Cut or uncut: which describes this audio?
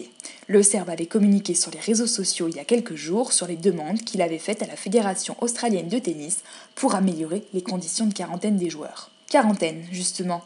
cut